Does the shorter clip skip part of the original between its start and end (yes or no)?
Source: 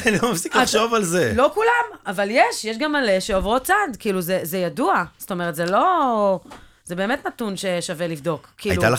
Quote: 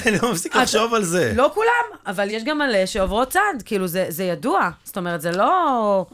yes